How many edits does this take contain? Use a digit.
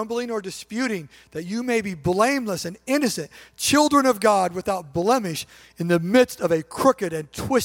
0